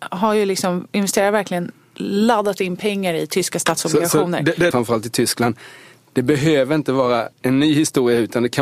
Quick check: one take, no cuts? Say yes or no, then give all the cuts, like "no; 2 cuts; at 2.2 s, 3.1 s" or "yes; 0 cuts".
no; 2 cuts; at 4.7 s, 7.3 s